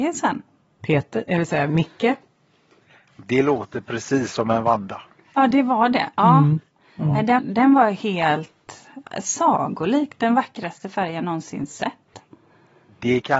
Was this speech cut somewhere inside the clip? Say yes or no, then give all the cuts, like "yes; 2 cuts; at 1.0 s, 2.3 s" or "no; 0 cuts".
yes; 2 cuts; at 7.4 s, 9.0 s